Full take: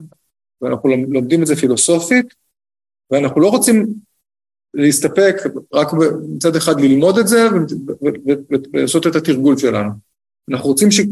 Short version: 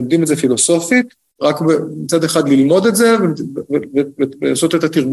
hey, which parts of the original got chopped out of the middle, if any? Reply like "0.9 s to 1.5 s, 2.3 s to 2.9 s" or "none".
2.6 s to 5.7 s